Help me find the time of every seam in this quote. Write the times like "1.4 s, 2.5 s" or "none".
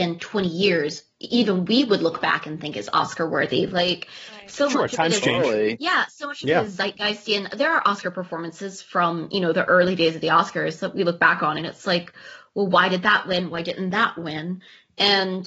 none